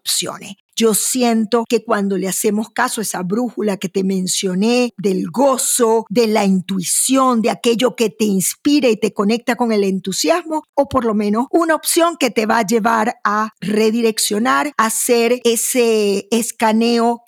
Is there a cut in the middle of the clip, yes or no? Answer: yes